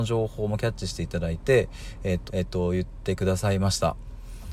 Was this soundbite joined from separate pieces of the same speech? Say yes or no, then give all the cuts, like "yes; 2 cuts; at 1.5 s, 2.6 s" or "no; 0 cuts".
yes; 1 cut; at 2.3 s